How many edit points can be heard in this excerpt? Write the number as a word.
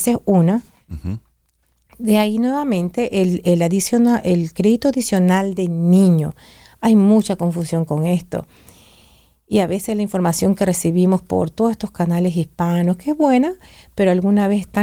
zero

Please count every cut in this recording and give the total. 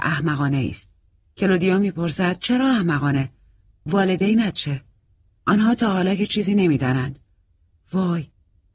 one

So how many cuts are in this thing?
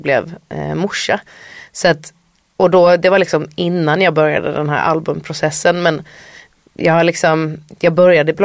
zero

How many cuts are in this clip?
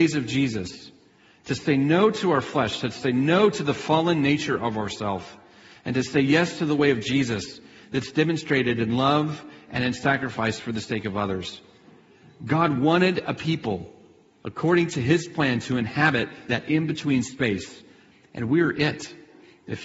zero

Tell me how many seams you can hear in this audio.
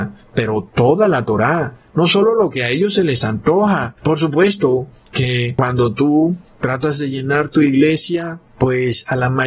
zero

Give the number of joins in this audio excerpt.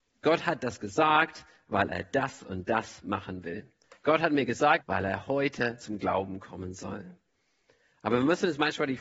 one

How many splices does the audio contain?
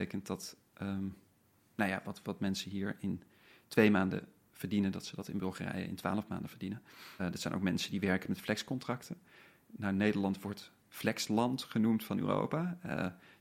one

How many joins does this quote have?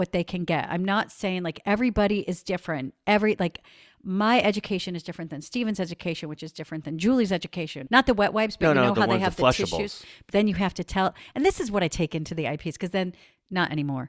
one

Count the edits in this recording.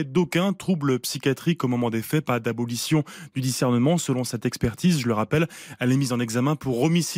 zero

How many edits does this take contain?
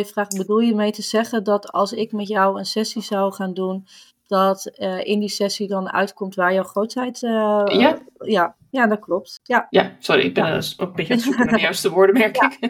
zero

